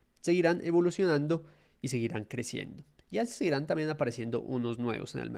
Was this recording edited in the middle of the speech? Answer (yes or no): no